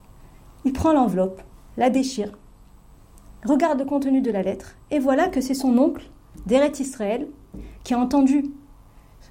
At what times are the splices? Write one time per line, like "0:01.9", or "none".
none